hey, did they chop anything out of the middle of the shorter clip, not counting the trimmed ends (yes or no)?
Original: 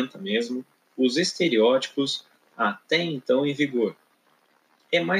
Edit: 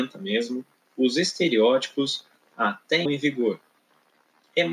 yes